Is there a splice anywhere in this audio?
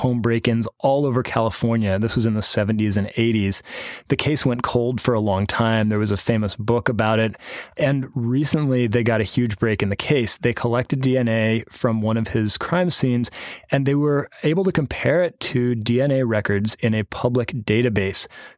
no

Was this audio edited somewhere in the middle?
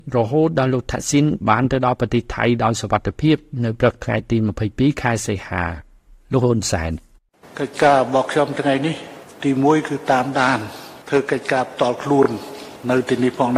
no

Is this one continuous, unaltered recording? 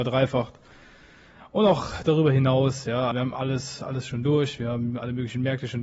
no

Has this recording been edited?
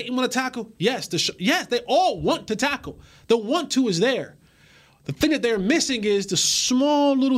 no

